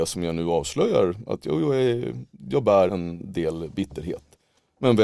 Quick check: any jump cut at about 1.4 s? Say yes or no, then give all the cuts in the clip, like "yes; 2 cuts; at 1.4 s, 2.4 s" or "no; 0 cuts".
no; 1 cut; at 2.9 s